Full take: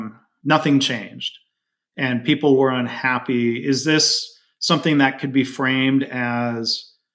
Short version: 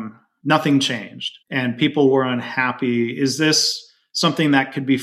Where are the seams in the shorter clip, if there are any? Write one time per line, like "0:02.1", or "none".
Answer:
0:01.4